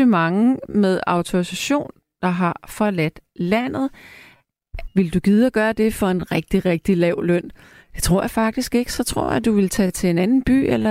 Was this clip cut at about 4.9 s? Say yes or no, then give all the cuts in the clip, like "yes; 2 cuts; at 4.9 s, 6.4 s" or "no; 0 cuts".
yes; 1 cut; at 4.9 s